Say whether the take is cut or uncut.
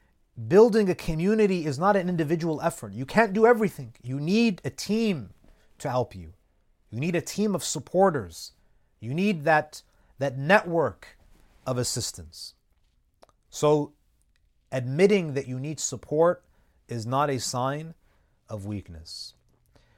uncut